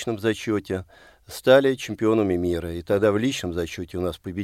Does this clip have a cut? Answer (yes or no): no